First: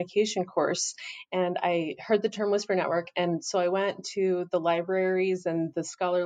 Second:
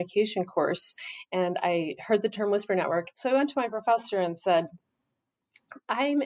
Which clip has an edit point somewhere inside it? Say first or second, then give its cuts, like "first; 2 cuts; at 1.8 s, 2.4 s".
second; 1 cut; at 3.1 s